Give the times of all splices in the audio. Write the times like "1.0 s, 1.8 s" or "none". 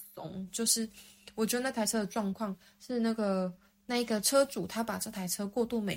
none